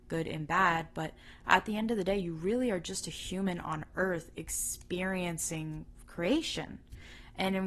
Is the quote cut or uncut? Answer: uncut